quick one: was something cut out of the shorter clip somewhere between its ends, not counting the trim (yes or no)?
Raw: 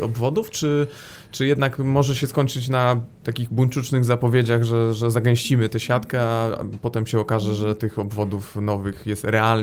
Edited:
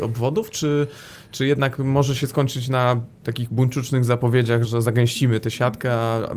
yes